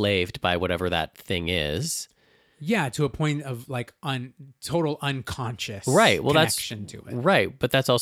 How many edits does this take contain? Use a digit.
0